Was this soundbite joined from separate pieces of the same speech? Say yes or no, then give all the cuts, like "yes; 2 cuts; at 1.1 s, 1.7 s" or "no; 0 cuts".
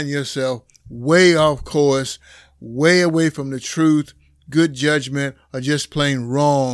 no; 0 cuts